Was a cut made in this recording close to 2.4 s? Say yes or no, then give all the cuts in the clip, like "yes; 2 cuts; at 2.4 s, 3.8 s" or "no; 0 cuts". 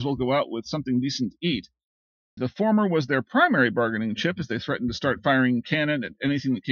yes; 1 cut; at 2.4 s